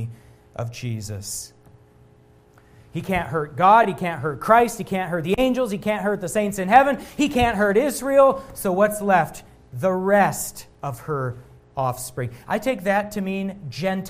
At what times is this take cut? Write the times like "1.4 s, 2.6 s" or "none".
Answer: none